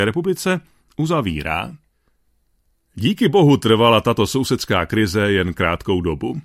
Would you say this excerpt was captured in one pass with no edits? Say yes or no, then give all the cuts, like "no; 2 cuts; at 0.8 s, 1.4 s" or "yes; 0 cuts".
yes; 0 cuts